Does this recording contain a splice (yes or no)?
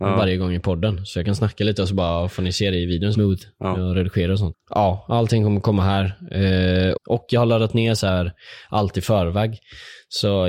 yes